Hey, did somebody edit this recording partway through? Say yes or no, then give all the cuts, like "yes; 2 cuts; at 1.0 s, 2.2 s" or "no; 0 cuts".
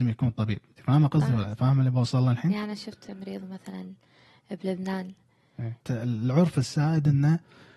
yes; 1 cut; at 5.8 s